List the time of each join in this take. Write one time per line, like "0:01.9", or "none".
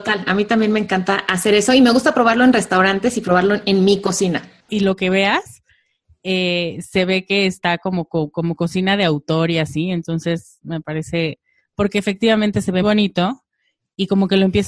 0:04.7
0:12.8